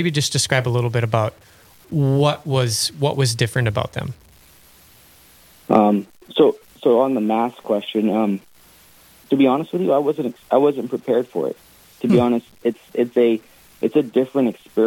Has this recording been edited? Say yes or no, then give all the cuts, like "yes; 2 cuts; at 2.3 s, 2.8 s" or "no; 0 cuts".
no; 0 cuts